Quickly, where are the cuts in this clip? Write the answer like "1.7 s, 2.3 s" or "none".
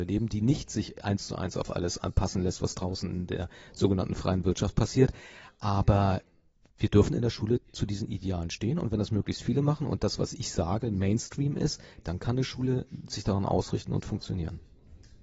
none